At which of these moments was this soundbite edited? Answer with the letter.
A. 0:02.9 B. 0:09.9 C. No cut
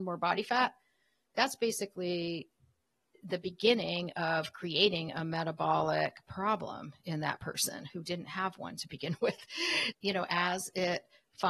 B